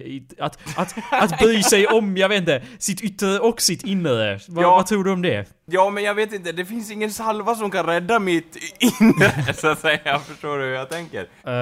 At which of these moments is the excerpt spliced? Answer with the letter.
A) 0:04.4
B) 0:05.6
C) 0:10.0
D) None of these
D